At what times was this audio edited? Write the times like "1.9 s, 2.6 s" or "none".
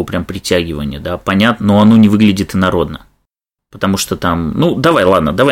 1.6 s